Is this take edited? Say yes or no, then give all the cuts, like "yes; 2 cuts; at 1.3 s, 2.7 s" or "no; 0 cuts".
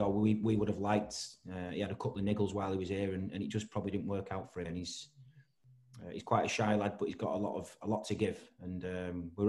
yes; 1 cut; at 4.6 s